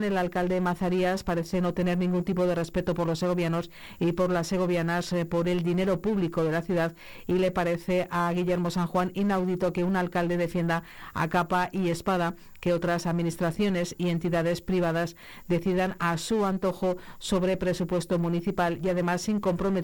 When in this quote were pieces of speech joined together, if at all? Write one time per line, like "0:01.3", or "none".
none